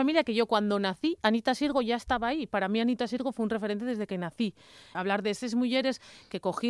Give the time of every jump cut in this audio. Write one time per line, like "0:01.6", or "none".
0:04.9